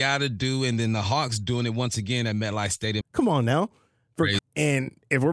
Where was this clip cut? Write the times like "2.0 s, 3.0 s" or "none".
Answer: 3.0 s, 4.4 s